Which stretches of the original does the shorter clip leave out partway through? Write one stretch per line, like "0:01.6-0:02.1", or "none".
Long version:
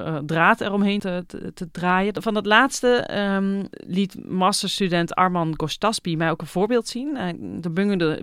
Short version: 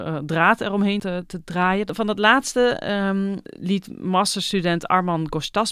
0:01.3-0:01.5